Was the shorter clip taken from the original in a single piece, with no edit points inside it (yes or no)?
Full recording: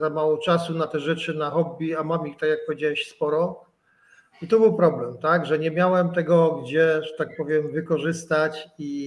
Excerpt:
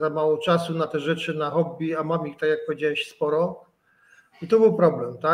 yes